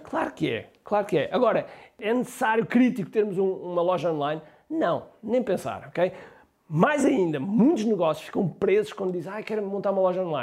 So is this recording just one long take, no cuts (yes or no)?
yes